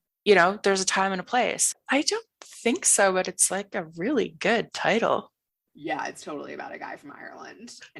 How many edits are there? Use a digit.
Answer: 1